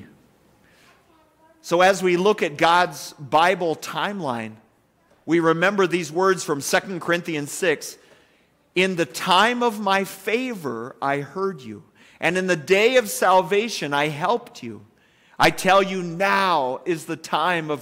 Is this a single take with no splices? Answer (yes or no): yes